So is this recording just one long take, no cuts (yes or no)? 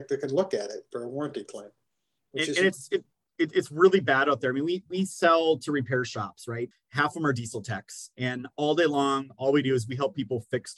no